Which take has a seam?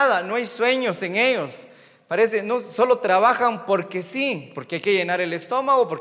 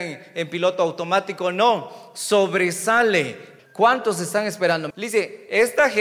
second; 2 cuts; at 3.6 s, 4.9 s

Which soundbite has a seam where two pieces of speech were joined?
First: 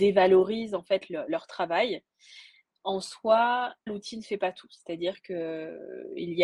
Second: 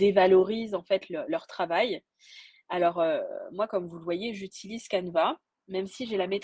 first; 2 cuts; at 2.7 s, 3.9 s

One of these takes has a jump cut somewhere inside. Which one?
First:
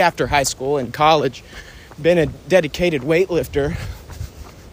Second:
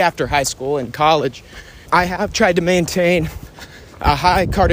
second; 1 cut; at 1.9 s

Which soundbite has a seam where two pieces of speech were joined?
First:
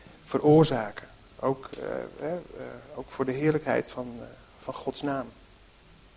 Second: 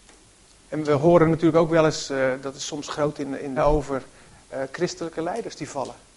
second; 1 cut; at 3.6 s

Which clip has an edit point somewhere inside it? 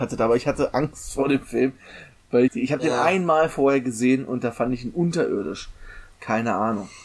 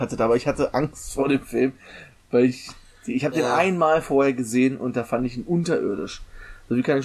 first; 2 cuts; at 2.5 s, 6.1 s

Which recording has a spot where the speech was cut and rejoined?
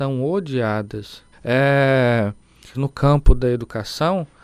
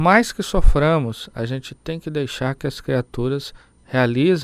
first; 2 cuts; at 1.3 s, 2.7 s

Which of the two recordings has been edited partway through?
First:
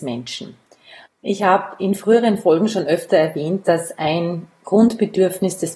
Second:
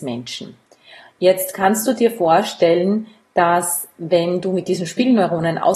first; 1 cut; at 1.1 s

